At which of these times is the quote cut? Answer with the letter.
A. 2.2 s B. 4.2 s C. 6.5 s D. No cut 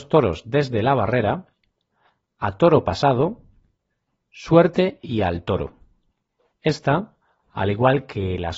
C